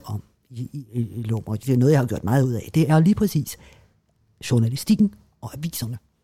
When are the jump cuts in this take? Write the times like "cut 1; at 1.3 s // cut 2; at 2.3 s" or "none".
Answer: none